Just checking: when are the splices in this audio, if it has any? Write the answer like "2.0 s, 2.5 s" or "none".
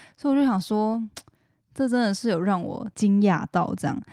2.9 s